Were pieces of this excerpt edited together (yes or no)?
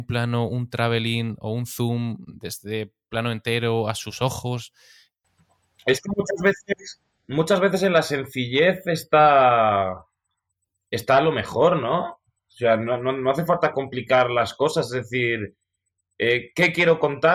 no